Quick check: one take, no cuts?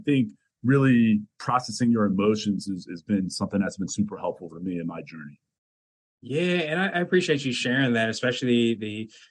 yes; 0 cuts

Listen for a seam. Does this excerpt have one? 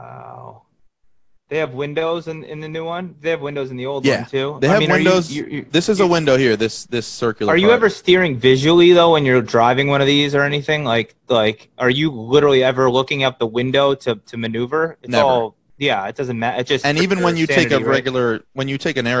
no; 0 cuts

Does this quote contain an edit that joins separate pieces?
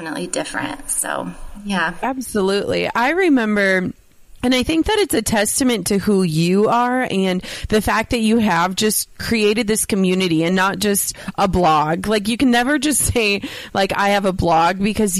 no; 0 cuts

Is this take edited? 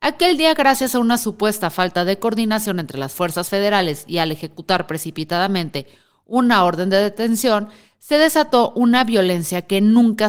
no; 0 cuts

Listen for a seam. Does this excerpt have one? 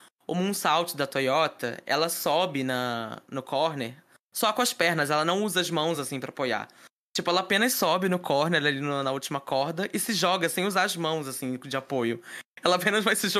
no; 0 cuts

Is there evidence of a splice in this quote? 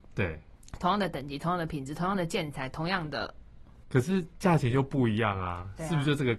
yes; 1 cut; at 3.8 s

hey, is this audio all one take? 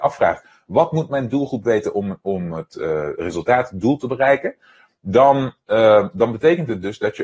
yes; 0 cuts

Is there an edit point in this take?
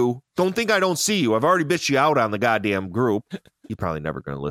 no; 0 cuts

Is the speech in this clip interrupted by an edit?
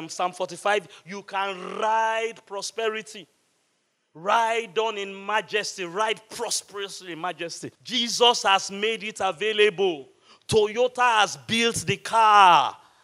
yes; 1 cut; at 7.8 s

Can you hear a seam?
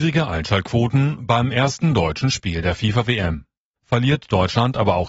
yes; 1 cut; at 3.8 s

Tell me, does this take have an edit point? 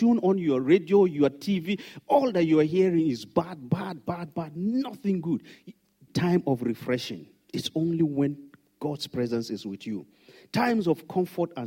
yes; 1 cut; at 6.1 s

